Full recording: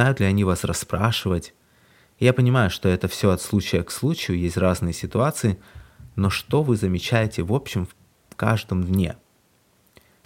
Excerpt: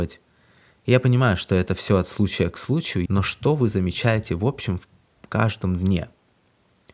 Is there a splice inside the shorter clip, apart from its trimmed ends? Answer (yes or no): yes